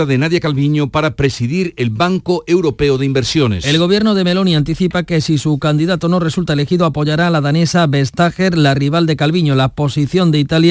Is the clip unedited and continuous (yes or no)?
yes